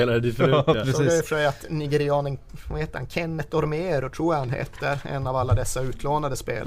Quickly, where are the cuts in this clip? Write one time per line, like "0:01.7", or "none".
none